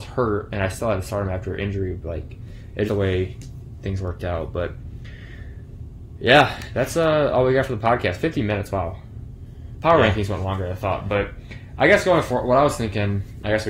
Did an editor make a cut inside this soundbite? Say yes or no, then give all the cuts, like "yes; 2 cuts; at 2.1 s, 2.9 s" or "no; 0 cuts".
yes; 1 cut; at 2.9 s